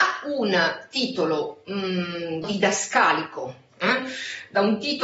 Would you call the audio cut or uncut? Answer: cut